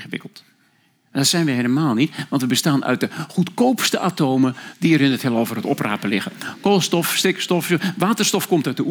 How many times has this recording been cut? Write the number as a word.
zero